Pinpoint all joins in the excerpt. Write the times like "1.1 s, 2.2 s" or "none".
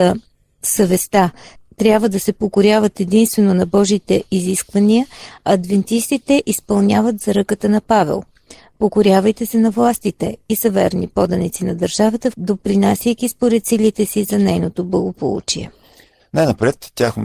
12.3 s, 16.2 s